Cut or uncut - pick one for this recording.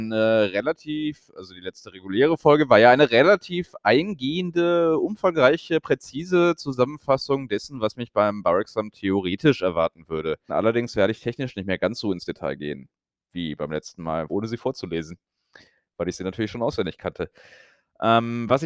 cut